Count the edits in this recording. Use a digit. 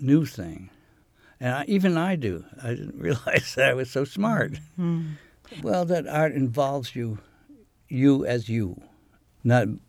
2